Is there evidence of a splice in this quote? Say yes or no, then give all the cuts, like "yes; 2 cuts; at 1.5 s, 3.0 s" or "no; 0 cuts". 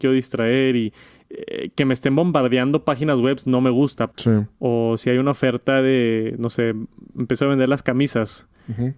yes; 1 cut; at 4.1 s